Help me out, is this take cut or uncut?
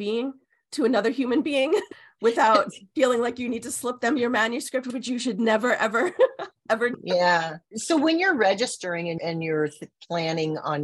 uncut